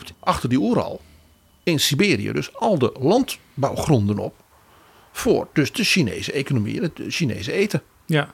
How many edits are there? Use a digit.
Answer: 0